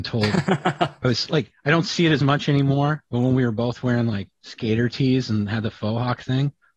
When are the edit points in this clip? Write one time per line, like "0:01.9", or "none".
none

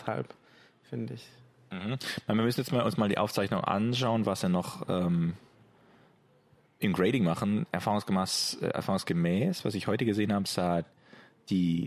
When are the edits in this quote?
none

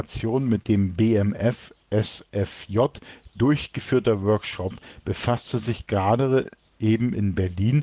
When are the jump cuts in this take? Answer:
none

